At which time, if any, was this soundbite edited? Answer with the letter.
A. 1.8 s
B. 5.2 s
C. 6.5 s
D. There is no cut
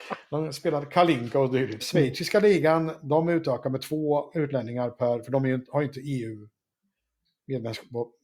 A